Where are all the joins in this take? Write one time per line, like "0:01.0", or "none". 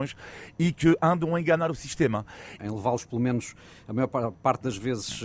0:02.6